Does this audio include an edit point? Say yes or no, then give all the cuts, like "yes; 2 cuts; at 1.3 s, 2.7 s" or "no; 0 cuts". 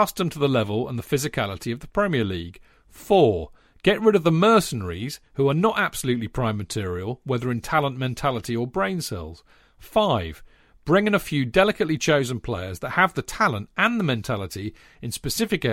no; 0 cuts